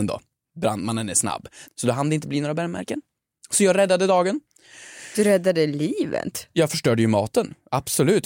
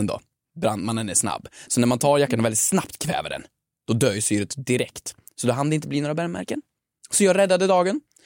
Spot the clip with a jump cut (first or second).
first